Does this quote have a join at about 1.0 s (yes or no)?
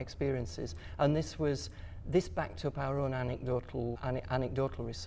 no